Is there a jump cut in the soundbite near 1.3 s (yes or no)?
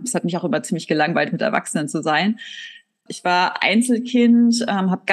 no